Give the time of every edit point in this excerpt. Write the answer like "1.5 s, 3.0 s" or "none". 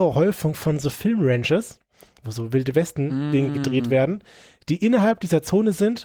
none